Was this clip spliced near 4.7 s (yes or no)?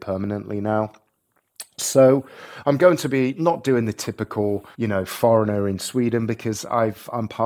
yes